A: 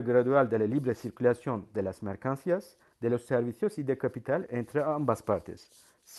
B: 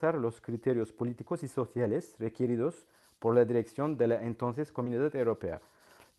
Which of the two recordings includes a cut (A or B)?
A